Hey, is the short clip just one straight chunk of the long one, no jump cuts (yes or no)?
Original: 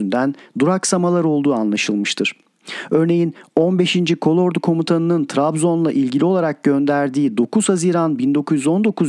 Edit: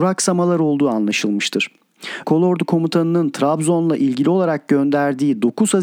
no